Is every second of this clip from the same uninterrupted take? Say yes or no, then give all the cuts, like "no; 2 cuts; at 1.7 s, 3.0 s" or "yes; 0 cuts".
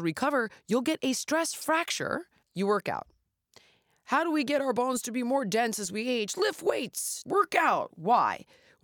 no; 2 cuts; at 2.4 s, 7.3 s